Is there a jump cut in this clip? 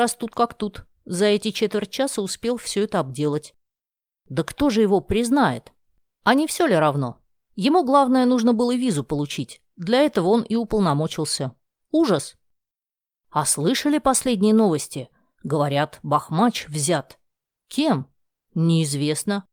no; 0 cuts

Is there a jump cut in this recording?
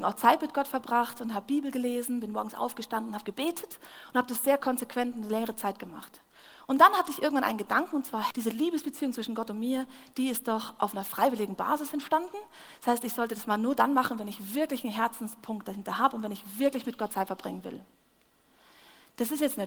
yes; 1 cut; at 8.3 s

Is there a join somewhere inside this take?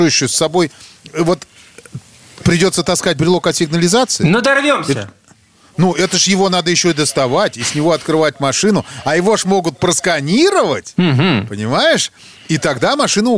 no; 0 cuts

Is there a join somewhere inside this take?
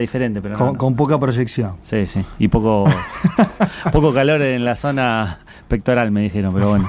no; 0 cuts

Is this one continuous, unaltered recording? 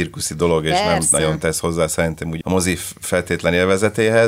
no; 1 cut; at 2.4 s

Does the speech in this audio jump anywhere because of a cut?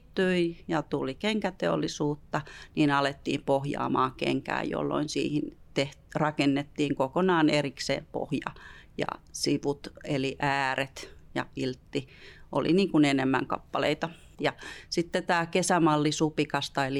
yes; 1 cut; at 14.3 s

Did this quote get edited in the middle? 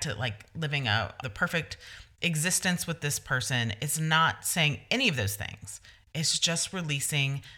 yes; 1 cut; at 1.2 s

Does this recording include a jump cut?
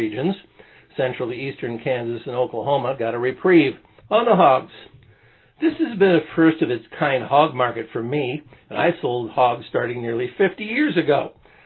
yes; 1 cut; at 4.1 s

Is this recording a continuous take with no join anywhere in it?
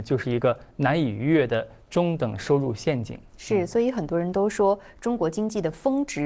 no; 1 cut; at 3.3 s

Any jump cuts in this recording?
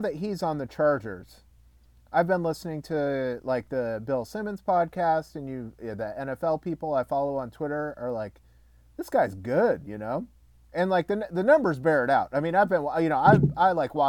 no; 0 cuts

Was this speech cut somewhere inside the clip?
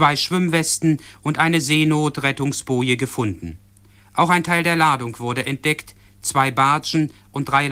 no; 0 cuts

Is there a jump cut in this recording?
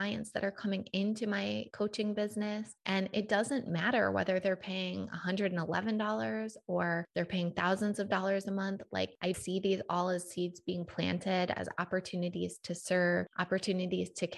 yes; 1 cut; at 9.3 s

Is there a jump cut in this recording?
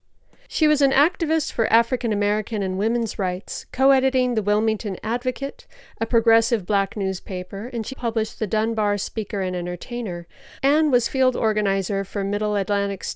yes; 2 cuts; at 7.9 s, 10.6 s

